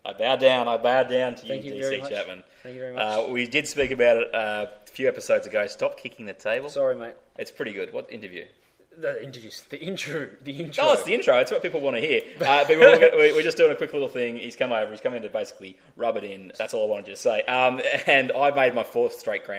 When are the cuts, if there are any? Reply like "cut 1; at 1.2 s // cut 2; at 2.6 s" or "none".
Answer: cut 1; at 7.3 s // cut 2; at 16.5 s